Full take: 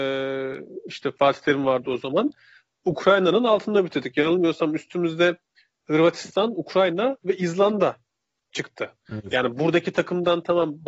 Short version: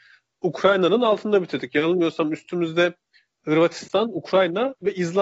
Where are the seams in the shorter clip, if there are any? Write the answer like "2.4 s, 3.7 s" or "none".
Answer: none